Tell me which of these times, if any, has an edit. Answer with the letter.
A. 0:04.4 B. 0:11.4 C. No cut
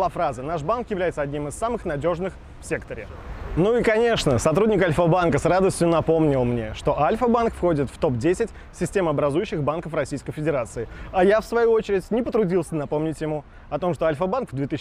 C